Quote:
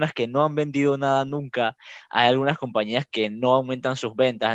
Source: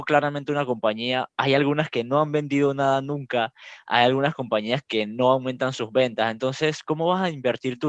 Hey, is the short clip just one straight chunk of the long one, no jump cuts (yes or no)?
yes